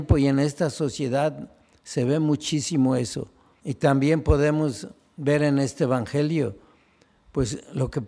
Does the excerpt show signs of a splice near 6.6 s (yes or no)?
no